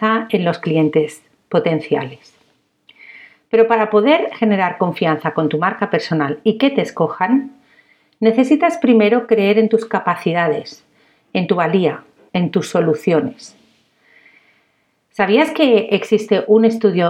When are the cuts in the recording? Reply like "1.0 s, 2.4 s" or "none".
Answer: 12.3 s